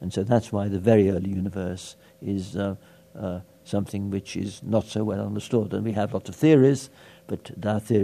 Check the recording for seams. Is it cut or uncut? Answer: uncut